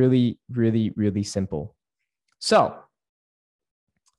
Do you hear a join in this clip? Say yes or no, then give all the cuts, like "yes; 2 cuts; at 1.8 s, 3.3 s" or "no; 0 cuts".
no; 0 cuts